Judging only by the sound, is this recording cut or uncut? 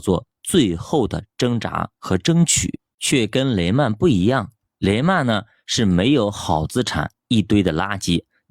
cut